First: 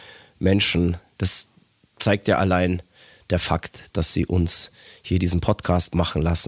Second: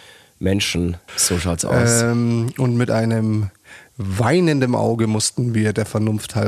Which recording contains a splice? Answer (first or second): second